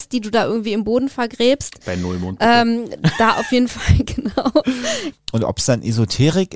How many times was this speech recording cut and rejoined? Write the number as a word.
one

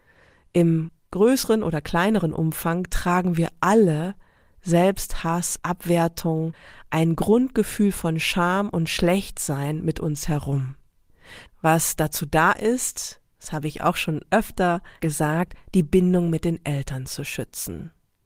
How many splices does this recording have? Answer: one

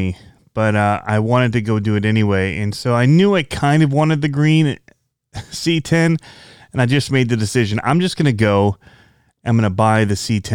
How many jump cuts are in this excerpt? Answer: zero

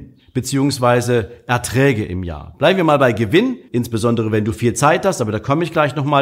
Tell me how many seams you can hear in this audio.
one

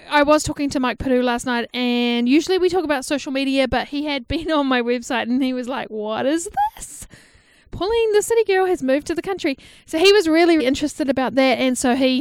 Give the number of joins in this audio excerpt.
one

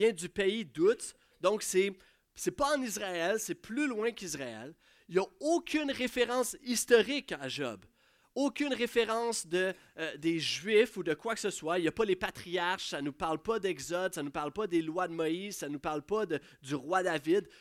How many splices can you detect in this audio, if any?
zero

